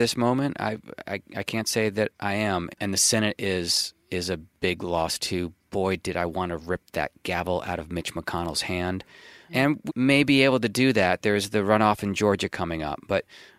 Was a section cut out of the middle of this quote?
yes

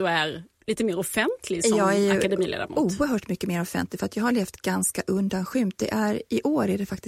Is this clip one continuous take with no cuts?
yes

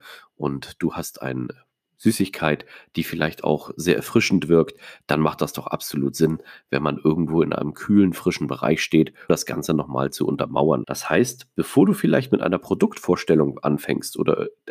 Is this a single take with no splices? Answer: no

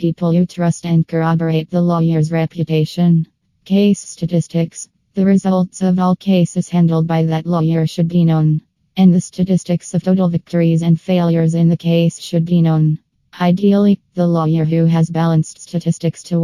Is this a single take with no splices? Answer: yes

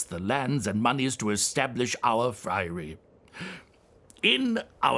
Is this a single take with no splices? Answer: yes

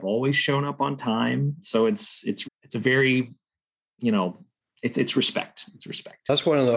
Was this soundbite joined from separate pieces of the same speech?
yes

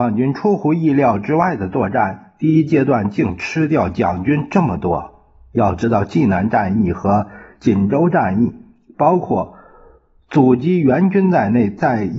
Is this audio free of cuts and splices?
yes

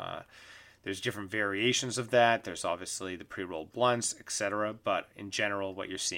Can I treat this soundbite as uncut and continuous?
yes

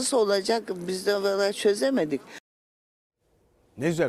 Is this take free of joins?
yes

